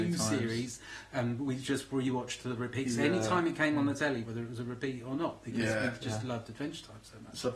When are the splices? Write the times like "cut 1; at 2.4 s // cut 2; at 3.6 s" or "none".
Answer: cut 1; at 4.2 s